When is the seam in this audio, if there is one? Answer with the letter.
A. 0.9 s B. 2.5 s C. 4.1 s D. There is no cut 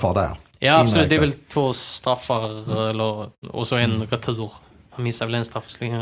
D